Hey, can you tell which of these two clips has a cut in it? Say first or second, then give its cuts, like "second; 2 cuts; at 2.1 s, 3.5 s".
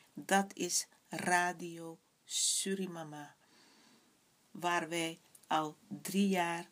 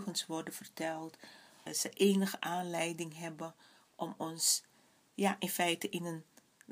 second; 2 cuts; at 1.7 s, 5.1 s